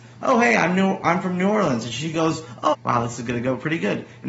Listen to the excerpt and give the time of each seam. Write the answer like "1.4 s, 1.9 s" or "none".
2.7 s